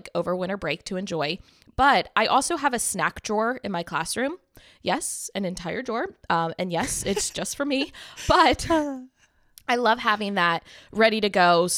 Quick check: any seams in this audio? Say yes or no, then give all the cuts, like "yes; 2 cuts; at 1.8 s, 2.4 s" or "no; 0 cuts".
no; 0 cuts